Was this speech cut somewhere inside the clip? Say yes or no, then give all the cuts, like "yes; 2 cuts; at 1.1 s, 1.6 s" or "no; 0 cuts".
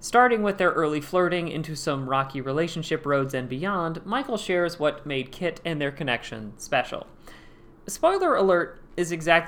no; 0 cuts